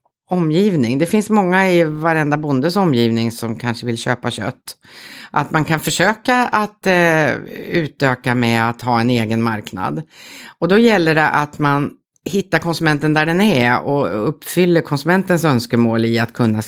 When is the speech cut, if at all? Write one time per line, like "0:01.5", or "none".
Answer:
none